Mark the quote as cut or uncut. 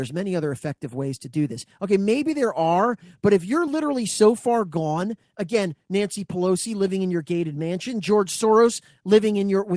uncut